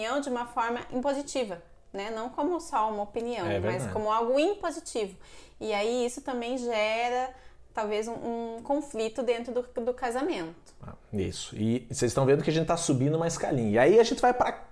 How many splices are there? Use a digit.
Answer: 0